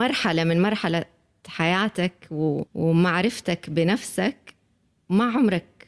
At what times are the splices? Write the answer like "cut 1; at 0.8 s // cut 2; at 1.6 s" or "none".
cut 1; at 2.7 s